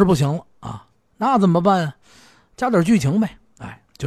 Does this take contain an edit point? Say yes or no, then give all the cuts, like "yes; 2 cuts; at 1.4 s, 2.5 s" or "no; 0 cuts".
no; 0 cuts